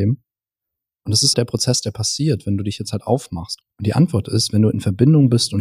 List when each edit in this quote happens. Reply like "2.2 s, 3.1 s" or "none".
1.3 s, 3.6 s